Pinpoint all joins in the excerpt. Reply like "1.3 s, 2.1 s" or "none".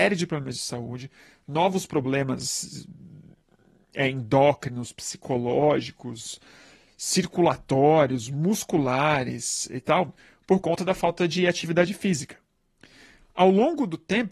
none